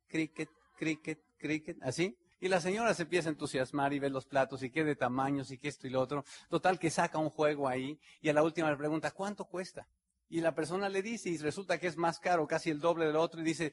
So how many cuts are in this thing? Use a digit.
1